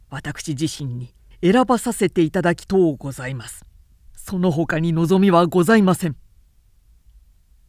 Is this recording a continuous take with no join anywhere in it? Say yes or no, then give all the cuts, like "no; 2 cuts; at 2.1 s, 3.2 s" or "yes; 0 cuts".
yes; 0 cuts